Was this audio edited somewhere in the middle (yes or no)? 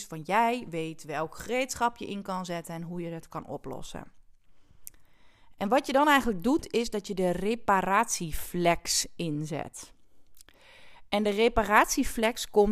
no